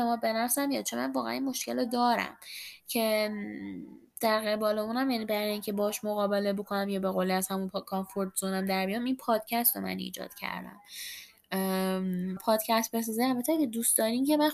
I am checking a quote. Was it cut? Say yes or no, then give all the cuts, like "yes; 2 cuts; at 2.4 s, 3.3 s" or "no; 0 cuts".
yes; 1 cut; at 12.4 s